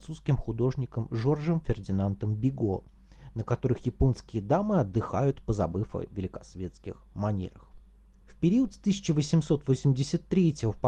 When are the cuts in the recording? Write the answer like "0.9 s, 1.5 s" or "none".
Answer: none